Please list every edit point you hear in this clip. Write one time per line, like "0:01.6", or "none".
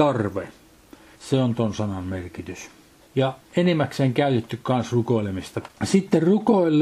0:01.2
0:05.7